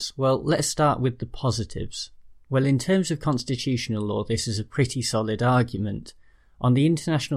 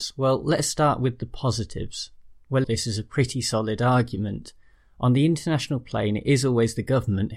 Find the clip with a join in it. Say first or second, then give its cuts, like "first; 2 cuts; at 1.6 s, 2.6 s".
second; 1 cut; at 2.6 s